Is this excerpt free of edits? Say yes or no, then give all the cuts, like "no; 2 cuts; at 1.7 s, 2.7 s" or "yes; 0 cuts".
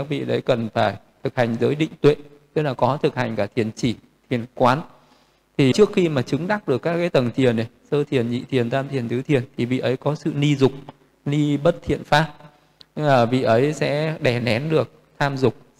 no; 1 cut; at 5.7 s